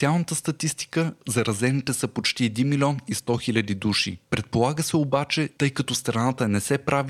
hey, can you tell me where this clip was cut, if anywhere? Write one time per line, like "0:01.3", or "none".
0:05.6